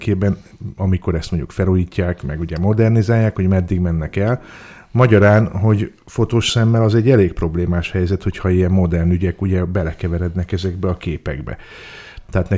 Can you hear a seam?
no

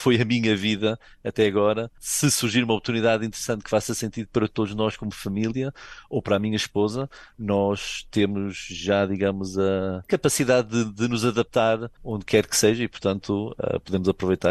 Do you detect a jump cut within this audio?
no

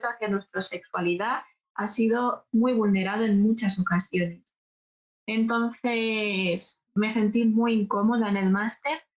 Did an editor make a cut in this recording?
no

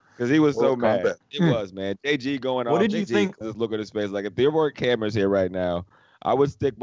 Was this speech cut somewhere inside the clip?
yes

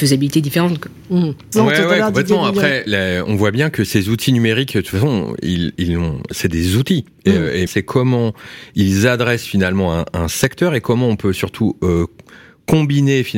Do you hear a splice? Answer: yes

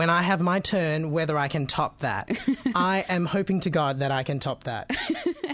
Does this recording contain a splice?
no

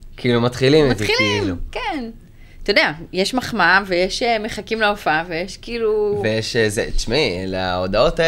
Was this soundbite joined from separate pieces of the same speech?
no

